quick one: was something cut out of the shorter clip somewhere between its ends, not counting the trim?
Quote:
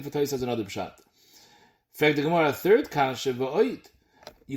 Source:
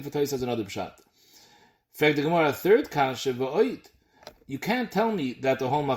no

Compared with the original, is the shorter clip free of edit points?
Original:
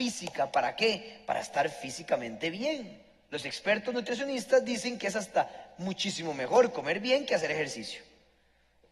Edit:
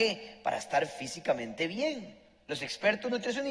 yes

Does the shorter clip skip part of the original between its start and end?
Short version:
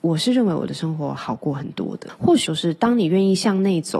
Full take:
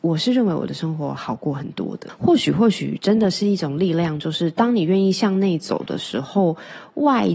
yes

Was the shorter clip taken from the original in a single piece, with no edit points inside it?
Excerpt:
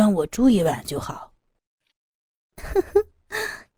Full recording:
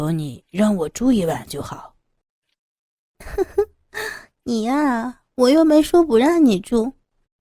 yes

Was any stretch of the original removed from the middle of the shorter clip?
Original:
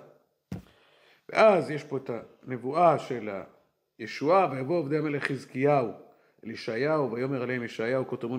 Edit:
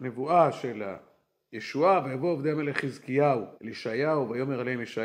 yes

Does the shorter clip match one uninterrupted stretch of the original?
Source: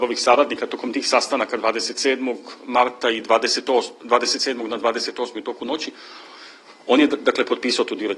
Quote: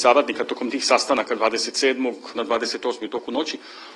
no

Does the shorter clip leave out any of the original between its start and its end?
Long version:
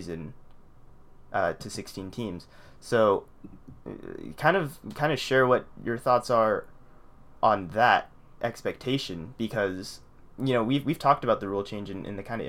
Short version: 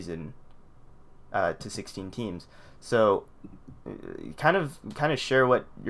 no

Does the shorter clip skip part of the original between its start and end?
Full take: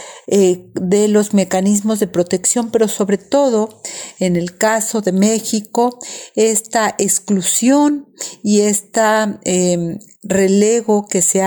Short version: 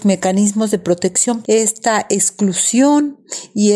yes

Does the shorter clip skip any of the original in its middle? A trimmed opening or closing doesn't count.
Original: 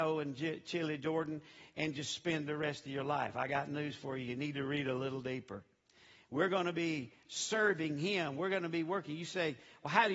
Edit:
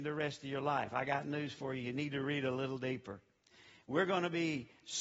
no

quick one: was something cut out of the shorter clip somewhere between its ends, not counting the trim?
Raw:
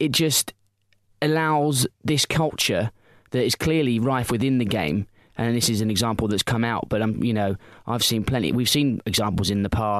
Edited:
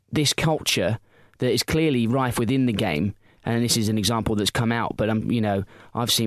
no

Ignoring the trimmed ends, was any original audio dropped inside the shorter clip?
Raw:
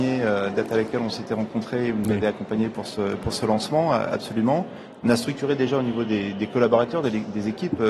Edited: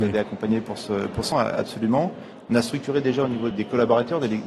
yes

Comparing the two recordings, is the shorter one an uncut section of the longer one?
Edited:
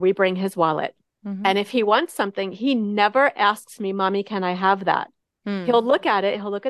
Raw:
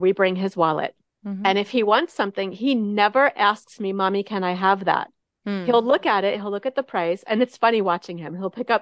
yes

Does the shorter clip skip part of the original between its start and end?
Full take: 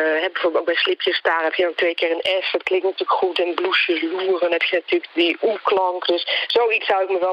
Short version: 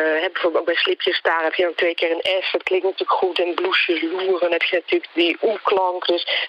no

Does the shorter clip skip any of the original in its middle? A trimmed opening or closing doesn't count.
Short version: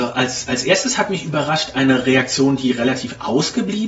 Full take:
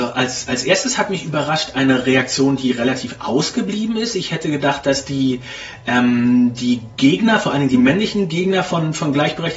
no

